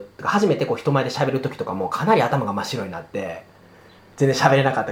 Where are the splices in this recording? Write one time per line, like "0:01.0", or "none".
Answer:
none

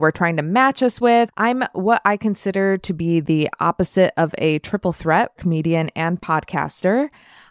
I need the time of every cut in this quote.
0:01.3
0:05.4

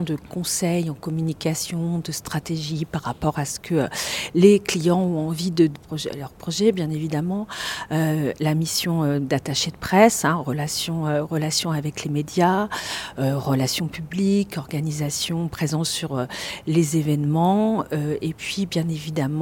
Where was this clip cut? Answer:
0:05.7

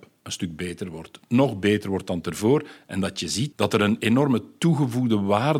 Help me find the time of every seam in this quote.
0:03.5

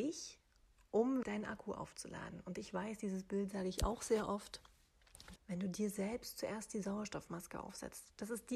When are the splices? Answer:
0:01.2
0:05.4

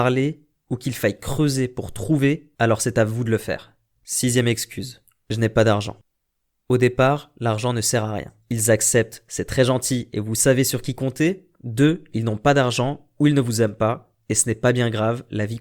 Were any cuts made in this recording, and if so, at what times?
0:08.4

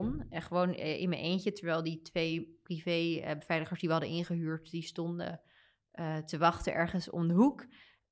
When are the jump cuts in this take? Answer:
none

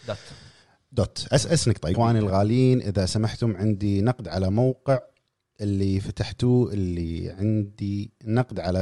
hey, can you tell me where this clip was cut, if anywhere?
0:01.9

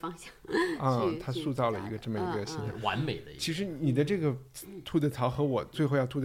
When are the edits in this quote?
none

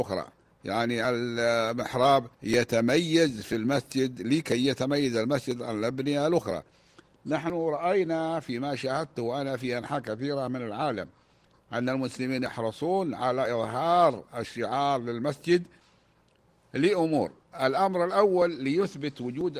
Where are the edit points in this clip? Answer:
0:02.3

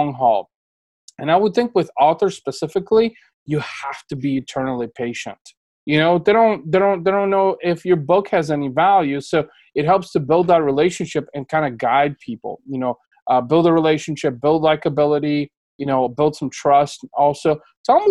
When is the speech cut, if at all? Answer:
0:05.8

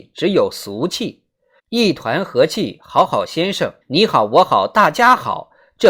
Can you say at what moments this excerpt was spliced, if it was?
0:01.6
0:03.8

